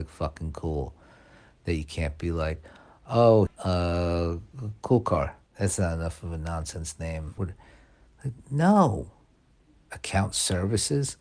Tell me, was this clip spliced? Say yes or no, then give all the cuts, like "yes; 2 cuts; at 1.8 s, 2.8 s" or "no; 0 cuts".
yes; 3 cuts; at 3.5 s, 5.5 s, 7.4 s